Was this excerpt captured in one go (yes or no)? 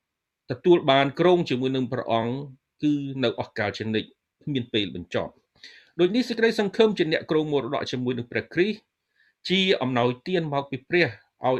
yes